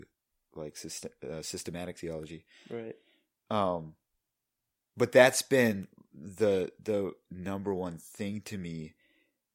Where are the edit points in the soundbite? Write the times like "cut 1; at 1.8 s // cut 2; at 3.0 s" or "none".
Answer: none